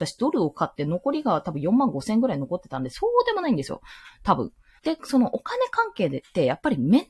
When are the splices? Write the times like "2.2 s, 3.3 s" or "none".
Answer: 4.8 s